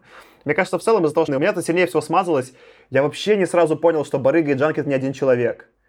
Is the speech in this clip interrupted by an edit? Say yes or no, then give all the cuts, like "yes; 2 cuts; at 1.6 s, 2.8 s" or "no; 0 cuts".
yes; 1 cut; at 1.3 s